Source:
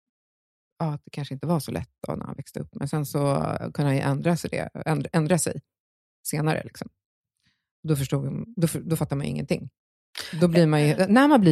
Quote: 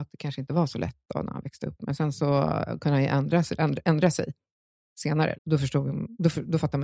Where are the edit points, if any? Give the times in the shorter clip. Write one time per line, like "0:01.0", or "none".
0:03.6
0:05.3